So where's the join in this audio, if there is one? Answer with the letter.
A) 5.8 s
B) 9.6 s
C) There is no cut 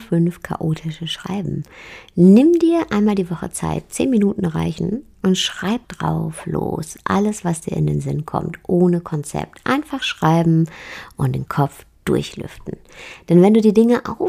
A